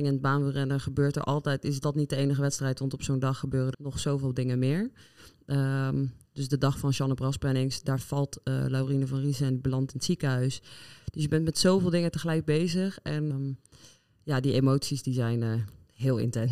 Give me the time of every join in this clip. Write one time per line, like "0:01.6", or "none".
0:03.7
0:13.3